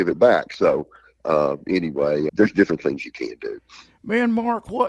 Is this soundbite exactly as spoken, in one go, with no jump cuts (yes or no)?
no